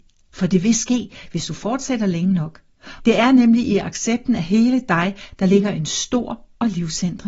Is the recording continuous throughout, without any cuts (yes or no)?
no